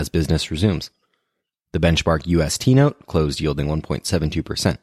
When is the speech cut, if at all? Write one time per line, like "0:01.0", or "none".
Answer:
none